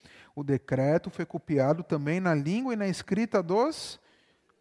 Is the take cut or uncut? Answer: uncut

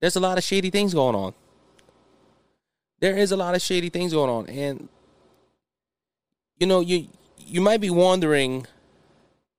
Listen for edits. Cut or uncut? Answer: uncut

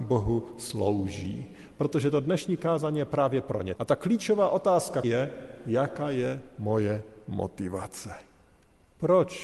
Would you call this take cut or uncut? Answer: cut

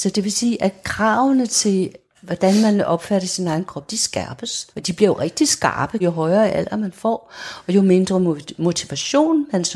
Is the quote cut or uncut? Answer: cut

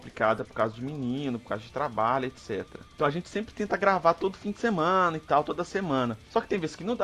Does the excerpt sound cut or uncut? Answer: uncut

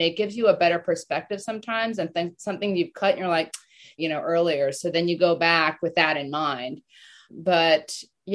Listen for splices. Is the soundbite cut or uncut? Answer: cut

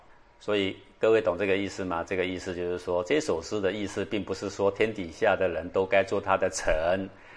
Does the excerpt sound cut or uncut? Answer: uncut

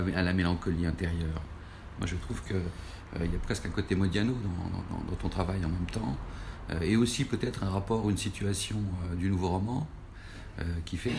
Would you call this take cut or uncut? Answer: uncut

